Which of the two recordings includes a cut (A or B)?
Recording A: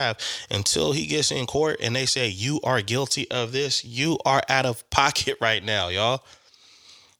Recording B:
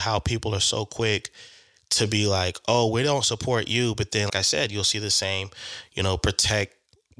B